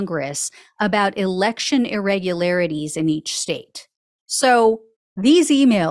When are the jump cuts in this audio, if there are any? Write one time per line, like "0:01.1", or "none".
0:04.2